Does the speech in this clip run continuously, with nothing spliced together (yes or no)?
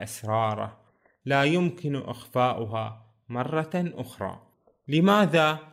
yes